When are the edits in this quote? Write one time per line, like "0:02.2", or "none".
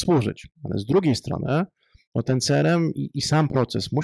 none